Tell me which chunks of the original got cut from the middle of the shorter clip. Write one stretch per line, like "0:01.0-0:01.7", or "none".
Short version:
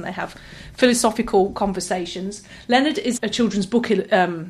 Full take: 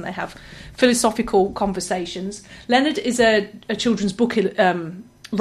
0:03.2-0:03.6